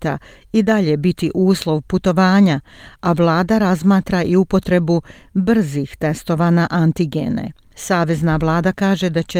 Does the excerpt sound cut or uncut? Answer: uncut